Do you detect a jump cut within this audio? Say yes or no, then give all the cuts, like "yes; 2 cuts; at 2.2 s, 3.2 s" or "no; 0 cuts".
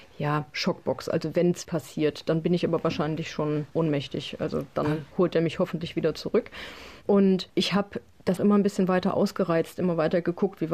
yes; 2 cuts; at 1.6 s, 8.4 s